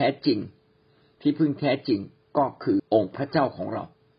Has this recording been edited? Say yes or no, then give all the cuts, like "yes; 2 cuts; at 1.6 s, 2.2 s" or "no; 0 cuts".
yes; 1 cut; at 2.8 s